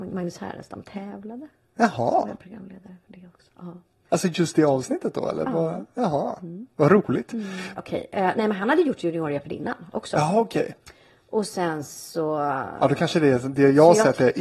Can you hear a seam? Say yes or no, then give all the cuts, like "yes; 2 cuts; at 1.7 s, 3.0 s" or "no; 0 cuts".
yes; 2 cuts; at 6.7 s, 7.8 s